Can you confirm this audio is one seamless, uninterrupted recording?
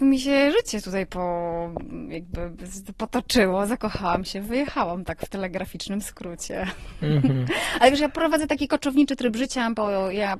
yes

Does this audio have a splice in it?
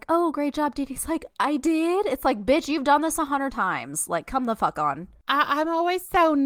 no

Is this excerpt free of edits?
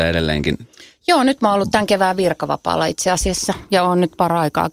yes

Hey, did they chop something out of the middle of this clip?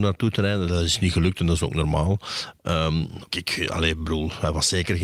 yes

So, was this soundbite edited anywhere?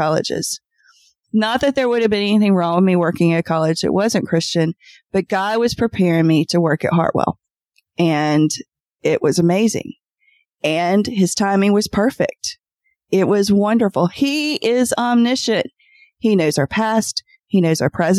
no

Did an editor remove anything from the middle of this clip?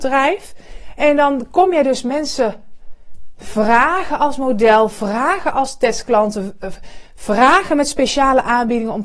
no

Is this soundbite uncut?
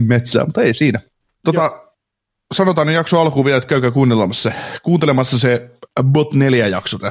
yes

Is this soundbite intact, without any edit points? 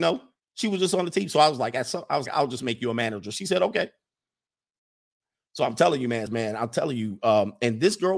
no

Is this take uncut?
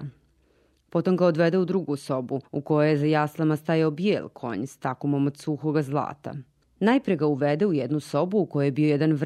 no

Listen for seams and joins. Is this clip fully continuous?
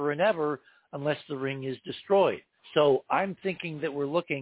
no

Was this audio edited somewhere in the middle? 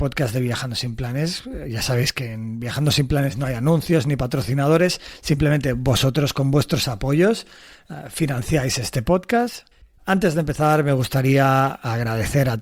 yes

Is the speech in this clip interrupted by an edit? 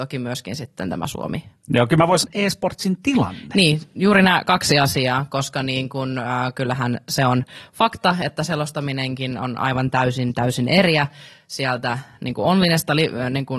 yes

